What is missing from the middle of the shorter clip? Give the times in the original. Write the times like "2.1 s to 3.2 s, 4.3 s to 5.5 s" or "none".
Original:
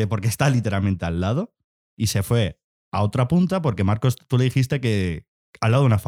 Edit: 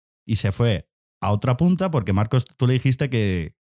none